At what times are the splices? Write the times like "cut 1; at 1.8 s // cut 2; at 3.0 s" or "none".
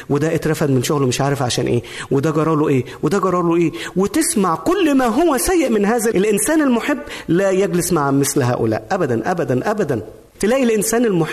cut 1; at 6.1 s